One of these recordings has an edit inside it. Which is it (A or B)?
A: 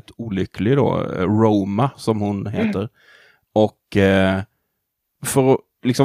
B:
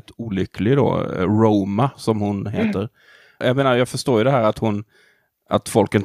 B